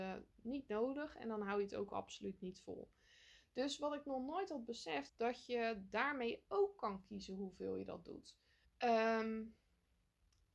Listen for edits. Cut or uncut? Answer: cut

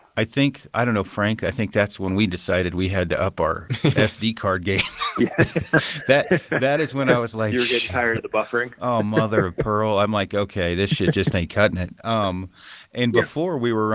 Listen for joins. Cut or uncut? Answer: uncut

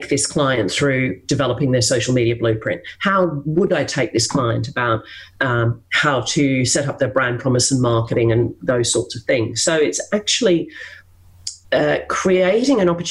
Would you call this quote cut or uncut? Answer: cut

